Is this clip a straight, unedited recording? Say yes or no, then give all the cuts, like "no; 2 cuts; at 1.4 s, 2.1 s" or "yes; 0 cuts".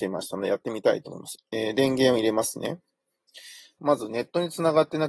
no; 2 cuts; at 1.3 s, 3.8 s